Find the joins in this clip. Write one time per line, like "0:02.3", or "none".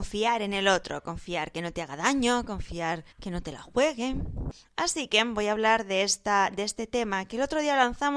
0:03.1